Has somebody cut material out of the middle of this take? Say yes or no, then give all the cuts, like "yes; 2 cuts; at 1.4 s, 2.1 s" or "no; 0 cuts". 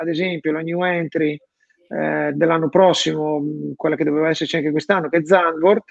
no; 0 cuts